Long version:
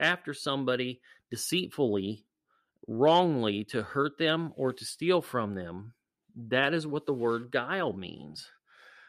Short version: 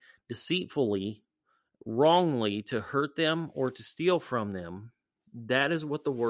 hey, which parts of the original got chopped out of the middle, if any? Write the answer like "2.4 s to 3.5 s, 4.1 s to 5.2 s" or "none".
none